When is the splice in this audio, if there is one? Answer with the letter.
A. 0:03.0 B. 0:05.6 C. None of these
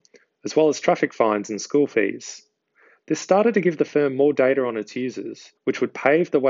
B